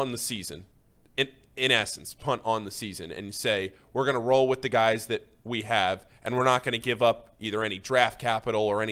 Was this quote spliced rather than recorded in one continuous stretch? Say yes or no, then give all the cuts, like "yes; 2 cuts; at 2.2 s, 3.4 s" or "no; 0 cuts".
no; 0 cuts